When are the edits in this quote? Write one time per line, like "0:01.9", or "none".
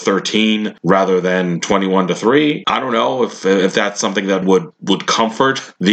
0:02.6
0:04.4